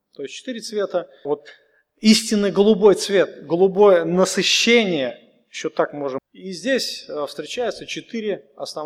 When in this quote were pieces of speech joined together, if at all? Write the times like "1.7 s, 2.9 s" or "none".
1.3 s, 6.2 s